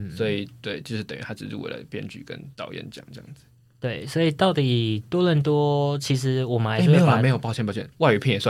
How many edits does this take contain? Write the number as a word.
one